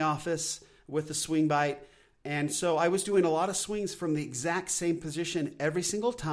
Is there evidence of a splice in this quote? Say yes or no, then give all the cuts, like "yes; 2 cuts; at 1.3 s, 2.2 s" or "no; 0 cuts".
no; 0 cuts